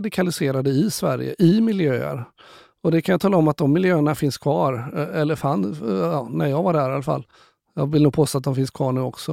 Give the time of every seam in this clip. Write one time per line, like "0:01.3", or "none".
none